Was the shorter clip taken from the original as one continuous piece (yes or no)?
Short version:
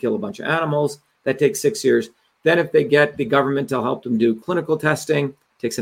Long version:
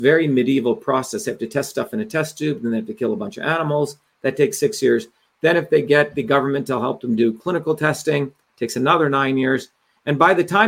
yes